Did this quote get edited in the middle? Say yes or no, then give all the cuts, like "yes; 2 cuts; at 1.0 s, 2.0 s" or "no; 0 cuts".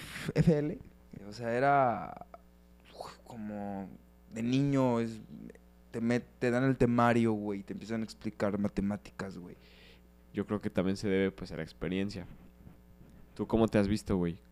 yes; 2 cuts; at 1.2 s, 10.2 s